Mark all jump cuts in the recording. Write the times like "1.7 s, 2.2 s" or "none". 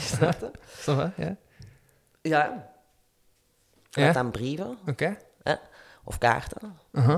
4.0 s